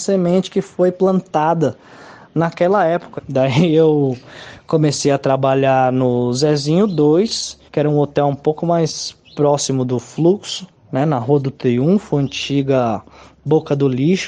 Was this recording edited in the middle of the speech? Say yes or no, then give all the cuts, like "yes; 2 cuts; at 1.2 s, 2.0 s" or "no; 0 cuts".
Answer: yes; 2 cuts; at 3.2 s, 7.7 s